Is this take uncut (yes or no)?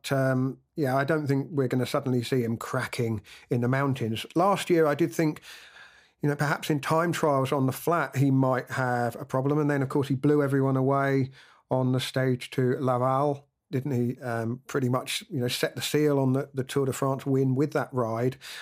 yes